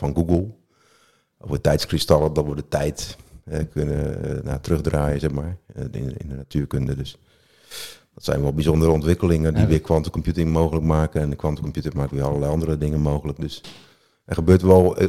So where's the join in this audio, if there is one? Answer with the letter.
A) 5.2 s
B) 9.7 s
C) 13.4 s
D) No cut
D